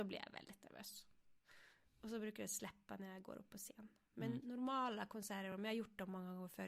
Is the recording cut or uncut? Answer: uncut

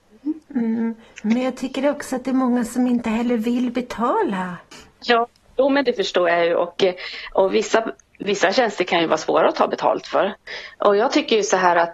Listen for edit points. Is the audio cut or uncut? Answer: uncut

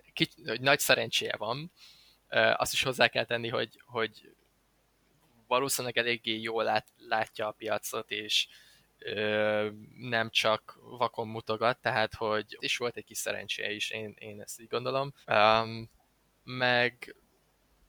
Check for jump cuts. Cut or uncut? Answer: cut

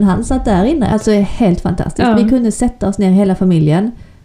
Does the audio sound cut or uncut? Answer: cut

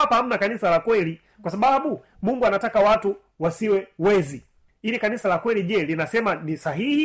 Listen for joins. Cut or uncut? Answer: uncut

